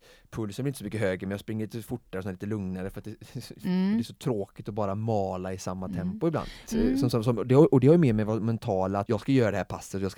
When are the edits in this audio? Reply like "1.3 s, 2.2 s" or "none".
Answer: 6.7 s, 9.1 s